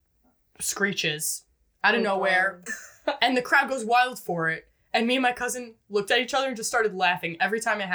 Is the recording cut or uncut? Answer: cut